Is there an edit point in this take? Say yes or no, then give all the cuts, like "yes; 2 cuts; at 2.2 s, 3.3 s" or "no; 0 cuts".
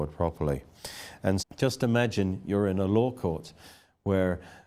yes; 1 cut; at 1.4 s